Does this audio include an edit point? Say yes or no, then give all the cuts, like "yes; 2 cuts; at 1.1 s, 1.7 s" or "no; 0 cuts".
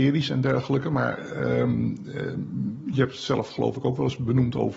no; 0 cuts